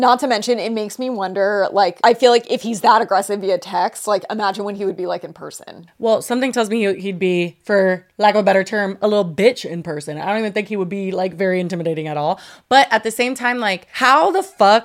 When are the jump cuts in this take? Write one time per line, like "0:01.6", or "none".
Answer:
none